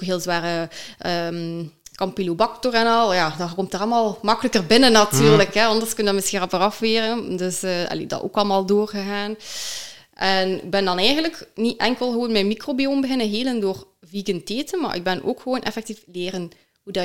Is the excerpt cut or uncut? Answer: uncut